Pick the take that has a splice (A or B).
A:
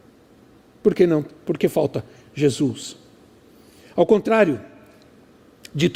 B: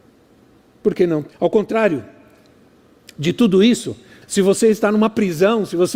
B